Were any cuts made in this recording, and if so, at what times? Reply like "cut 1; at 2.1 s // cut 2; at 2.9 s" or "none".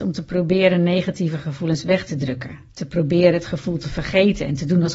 cut 1; at 2.7 s